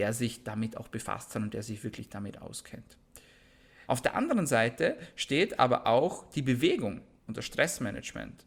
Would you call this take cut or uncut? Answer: cut